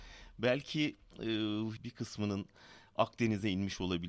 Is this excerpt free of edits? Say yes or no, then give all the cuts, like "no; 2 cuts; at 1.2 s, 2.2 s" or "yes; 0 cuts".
no; 1 cut; at 1.8 s